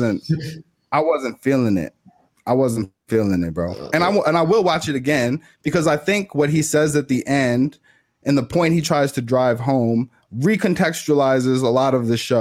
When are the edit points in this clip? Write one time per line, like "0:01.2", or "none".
none